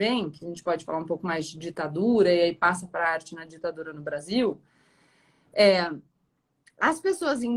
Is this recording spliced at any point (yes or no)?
no